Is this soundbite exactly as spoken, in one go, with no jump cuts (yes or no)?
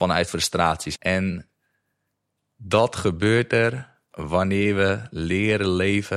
no